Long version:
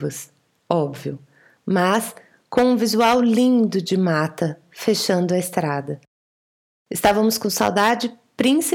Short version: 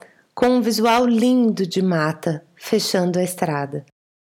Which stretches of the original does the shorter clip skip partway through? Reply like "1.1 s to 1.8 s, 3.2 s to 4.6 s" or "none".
none